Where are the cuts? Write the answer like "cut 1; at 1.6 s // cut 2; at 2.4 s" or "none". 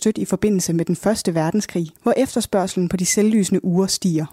cut 1; at 2.0 s